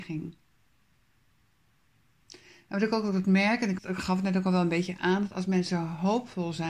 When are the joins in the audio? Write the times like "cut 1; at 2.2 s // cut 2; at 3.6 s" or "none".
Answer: cut 1; at 3.8 s